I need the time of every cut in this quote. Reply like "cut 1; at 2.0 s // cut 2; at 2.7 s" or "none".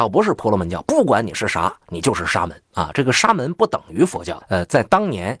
cut 1; at 2.7 s // cut 2; at 4.4 s